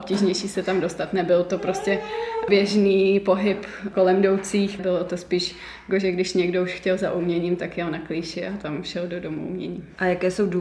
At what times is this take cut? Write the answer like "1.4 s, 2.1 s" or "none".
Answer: 4.8 s